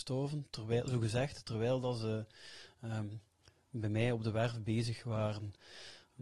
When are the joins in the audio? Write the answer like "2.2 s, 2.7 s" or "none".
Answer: none